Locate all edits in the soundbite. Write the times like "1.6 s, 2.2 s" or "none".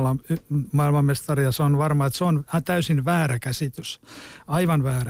none